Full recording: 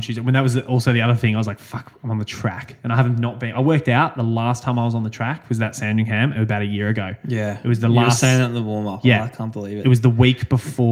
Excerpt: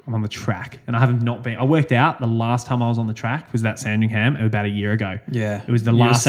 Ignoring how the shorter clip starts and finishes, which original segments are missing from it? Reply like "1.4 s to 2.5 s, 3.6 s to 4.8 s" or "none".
none